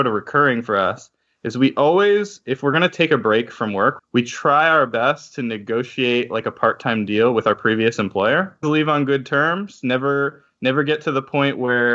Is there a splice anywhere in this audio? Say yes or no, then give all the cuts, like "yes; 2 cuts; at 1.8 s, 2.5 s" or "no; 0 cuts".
yes; 2 cuts; at 4.0 s, 8.6 s